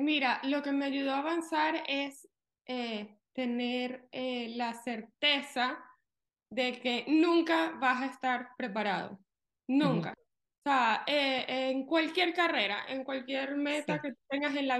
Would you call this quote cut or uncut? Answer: uncut